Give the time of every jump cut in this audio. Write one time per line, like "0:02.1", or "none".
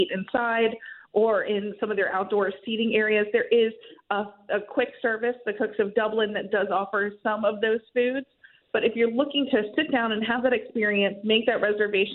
none